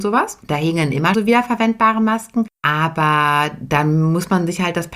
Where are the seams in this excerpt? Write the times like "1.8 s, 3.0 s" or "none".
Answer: 1.1 s

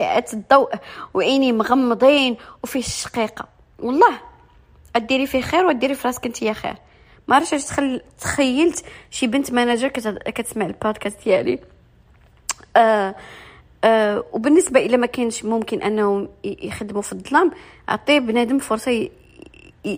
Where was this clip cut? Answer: none

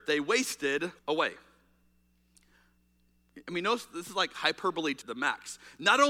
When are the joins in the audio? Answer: 1.0 s, 5.0 s

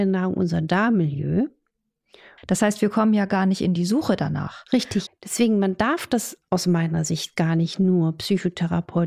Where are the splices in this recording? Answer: 2.4 s, 5.1 s

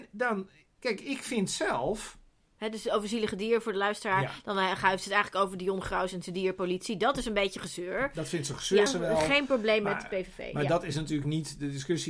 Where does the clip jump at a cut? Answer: 8.9 s

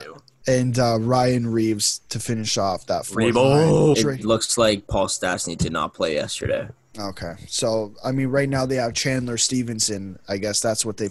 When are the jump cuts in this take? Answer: 3.9 s

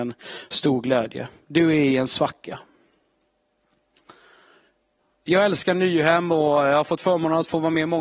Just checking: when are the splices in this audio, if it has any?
none

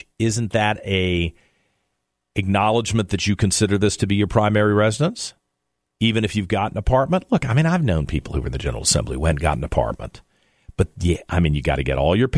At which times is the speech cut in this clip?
none

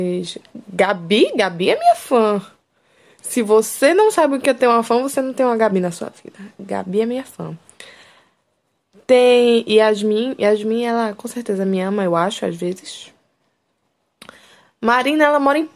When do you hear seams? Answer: none

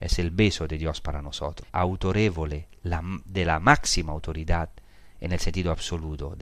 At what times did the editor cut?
1.7 s

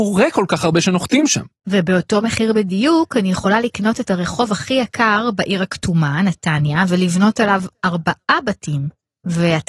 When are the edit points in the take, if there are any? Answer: none

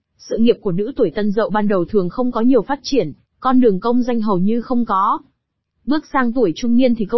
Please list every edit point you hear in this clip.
5.7 s

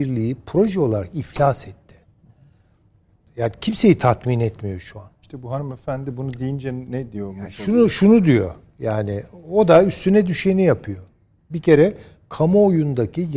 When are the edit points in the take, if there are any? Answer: none

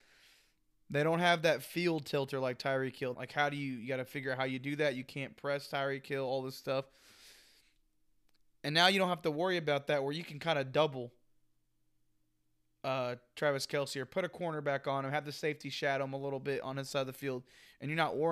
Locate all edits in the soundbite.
3.1 s

